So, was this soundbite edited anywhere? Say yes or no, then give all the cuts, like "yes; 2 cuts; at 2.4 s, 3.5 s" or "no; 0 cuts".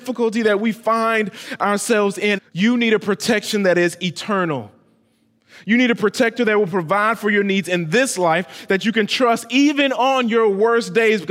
yes; 1 cut; at 2.4 s